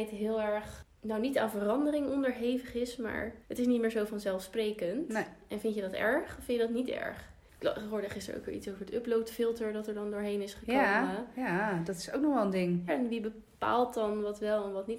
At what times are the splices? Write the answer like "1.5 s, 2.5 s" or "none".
3.4 s, 12.9 s